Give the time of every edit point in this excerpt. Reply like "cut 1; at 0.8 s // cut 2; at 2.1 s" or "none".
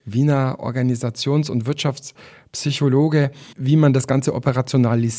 cut 1; at 3.5 s